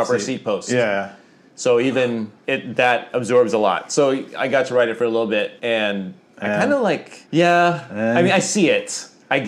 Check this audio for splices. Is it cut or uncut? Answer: uncut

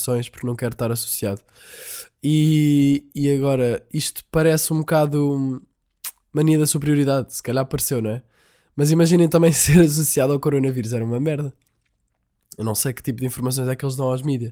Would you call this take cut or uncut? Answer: uncut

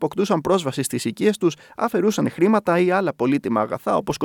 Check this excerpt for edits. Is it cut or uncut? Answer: uncut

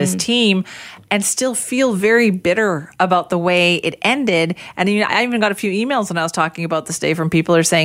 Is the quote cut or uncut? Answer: uncut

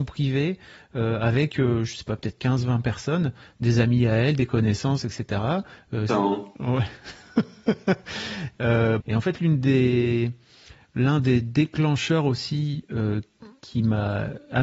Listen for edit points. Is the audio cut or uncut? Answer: cut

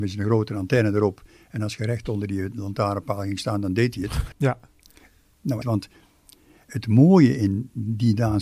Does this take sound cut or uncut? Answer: cut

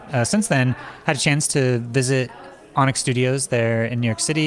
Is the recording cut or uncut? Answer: uncut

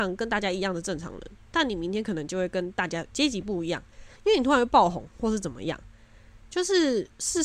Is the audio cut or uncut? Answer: uncut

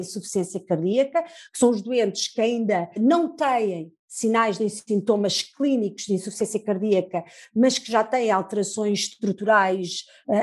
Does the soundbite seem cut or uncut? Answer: cut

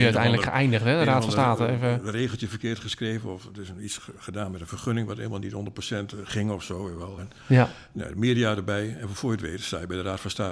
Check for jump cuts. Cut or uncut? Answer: uncut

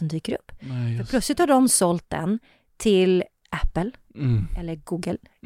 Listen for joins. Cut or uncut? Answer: cut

